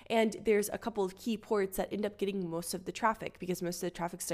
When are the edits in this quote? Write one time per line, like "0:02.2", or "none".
none